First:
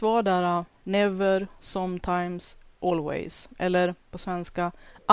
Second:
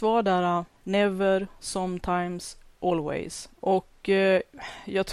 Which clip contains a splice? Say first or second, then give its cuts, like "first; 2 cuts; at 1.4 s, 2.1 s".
second; 1 cut; at 3.5 s